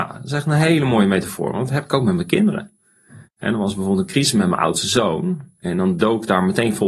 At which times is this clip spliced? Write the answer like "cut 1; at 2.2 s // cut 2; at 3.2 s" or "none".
cut 1; at 3.2 s